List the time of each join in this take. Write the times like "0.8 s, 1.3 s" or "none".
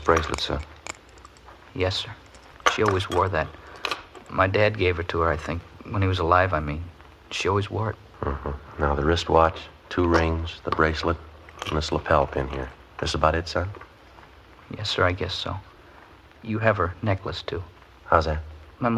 none